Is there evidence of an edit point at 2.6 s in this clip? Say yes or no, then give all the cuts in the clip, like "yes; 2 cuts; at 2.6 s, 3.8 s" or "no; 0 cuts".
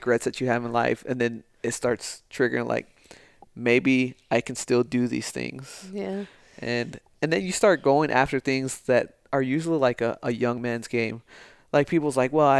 no; 0 cuts